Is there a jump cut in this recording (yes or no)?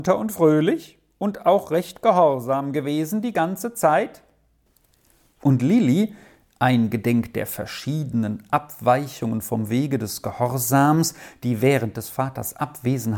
yes